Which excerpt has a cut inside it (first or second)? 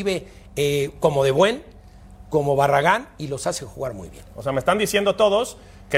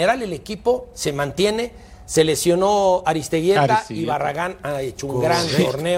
first